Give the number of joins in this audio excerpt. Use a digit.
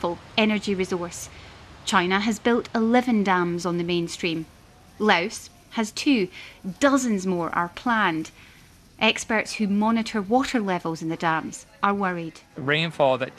0